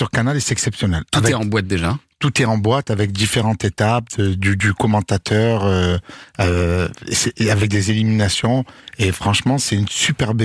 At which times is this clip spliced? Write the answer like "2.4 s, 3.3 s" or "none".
none